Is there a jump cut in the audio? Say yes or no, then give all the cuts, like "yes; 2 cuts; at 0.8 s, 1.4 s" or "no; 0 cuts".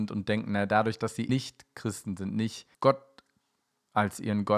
yes; 2 cuts; at 1.3 s, 2.7 s